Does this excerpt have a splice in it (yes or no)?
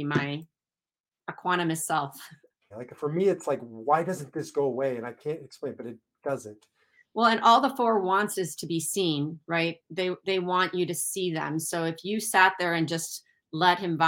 yes